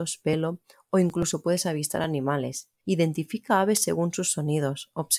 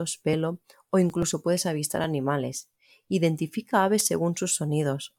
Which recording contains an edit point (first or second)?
first